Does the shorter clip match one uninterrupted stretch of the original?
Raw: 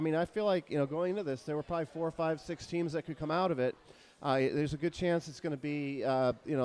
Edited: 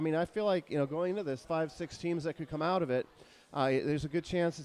no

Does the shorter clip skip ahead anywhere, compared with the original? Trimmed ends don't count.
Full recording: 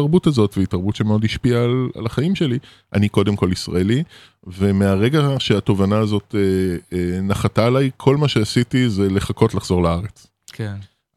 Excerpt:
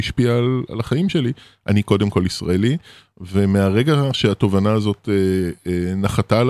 no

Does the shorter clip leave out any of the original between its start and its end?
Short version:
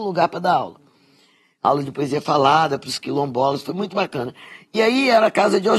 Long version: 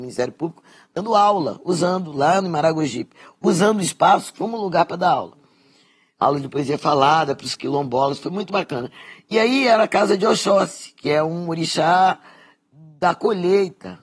no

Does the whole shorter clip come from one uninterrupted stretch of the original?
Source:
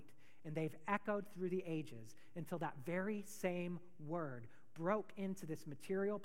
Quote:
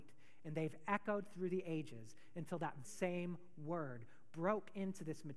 no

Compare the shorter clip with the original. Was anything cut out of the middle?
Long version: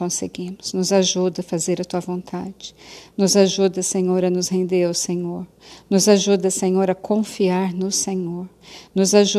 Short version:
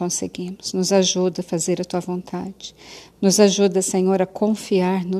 yes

